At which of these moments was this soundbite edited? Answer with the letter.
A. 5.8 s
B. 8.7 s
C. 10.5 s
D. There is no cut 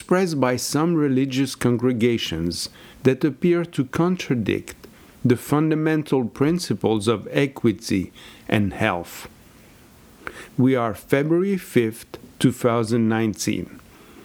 C